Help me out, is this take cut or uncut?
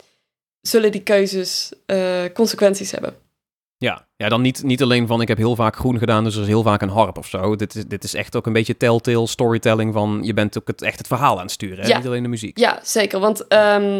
uncut